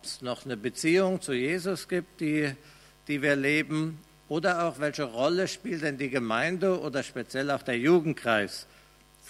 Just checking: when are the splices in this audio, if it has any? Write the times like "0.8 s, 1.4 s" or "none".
none

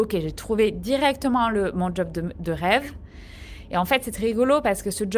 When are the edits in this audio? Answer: none

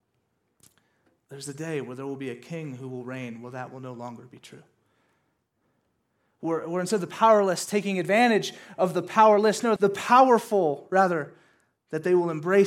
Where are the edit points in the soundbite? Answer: 9.8 s

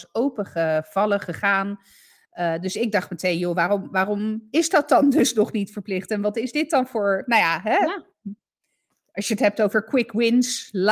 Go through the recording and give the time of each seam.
2.2 s

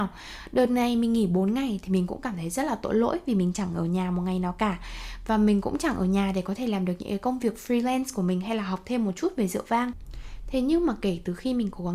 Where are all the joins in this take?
none

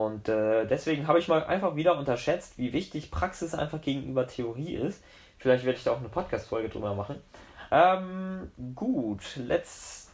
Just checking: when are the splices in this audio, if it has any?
7.7 s

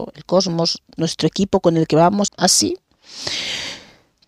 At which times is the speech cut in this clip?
1.0 s, 2.3 s

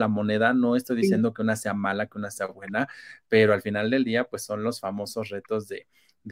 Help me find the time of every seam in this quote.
none

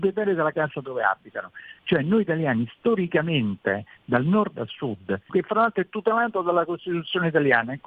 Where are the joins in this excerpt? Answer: 1.8 s, 5.3 s

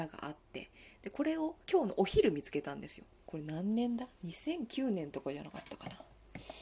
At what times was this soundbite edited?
1.6 s

